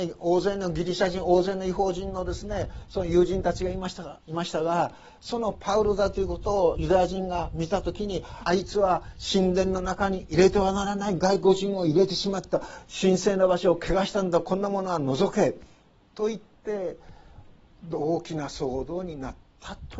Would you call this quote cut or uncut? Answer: cut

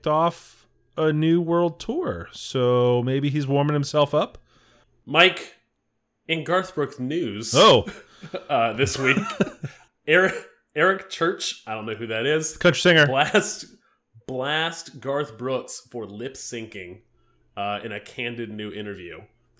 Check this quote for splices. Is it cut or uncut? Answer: uncut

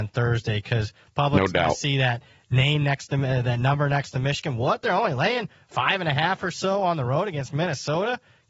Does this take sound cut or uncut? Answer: uncut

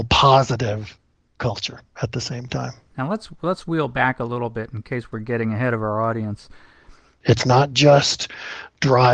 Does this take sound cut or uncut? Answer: cut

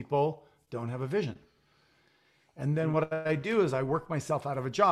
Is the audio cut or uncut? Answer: uncut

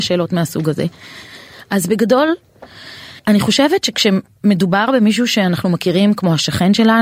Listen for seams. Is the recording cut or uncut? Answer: cut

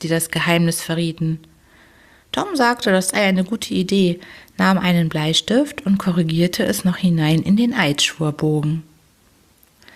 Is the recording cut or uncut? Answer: uncut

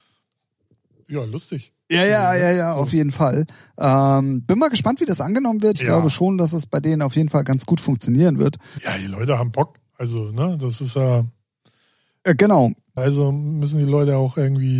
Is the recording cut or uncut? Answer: cut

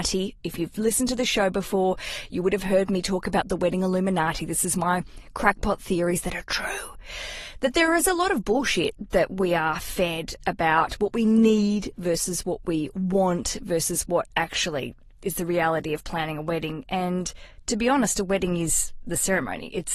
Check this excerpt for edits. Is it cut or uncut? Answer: uncut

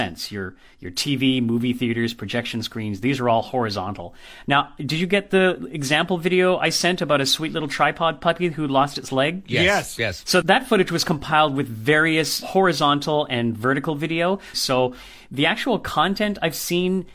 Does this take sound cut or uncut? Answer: cut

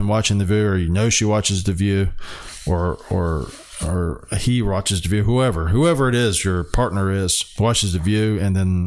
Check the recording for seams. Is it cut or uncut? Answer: uncut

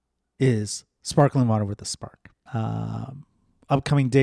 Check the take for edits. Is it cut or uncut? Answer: cut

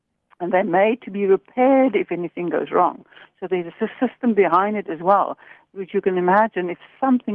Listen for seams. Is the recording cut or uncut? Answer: uncut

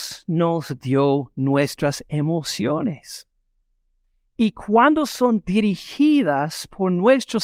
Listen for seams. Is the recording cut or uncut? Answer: uncut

